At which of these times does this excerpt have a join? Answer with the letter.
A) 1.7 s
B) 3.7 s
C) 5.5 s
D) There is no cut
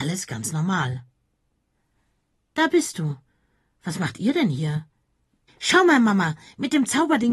C